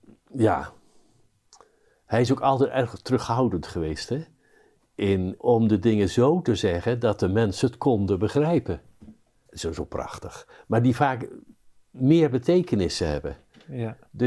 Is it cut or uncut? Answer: cut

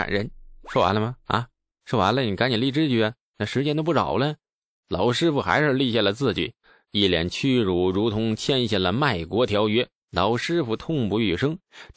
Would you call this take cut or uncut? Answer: cut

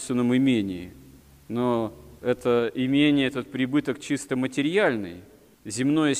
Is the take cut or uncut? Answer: cut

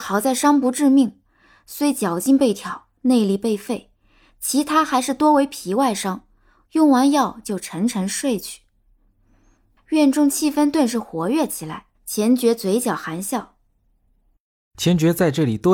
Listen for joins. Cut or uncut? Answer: cut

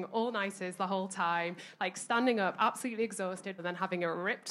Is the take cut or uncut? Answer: cut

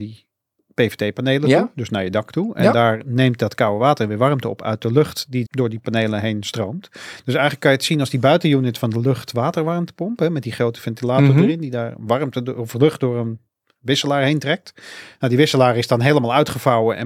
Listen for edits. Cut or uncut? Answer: cut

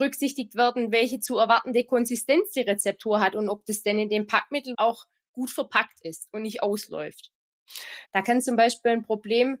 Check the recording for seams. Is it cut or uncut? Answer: cut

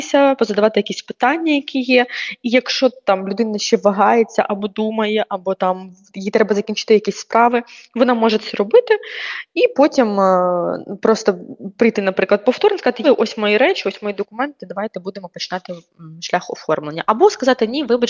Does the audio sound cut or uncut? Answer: cut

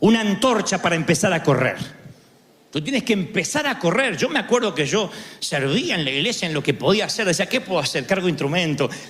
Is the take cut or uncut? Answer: uncut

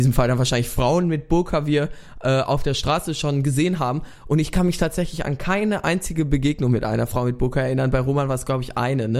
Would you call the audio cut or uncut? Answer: uncut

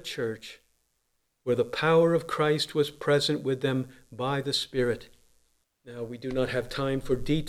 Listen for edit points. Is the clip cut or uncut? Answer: cut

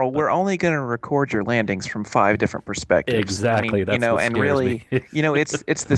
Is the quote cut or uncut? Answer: uncut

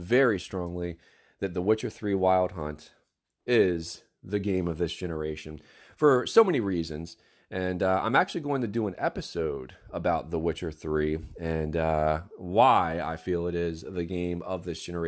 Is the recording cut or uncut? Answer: uncut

